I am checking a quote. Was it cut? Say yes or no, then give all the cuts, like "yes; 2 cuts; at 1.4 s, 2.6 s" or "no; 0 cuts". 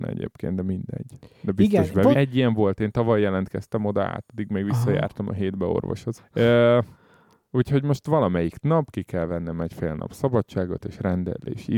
yes; 2 cuts; at 2.1 s, 6.2 s